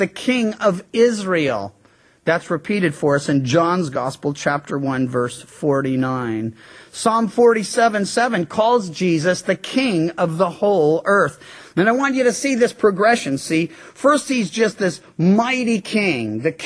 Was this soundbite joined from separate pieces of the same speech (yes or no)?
no